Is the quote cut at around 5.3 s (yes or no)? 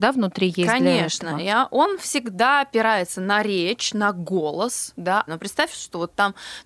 yes